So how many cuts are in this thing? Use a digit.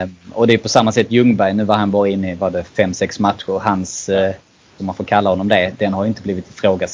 1